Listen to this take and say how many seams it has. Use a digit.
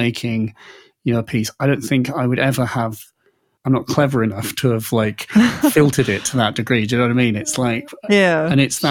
0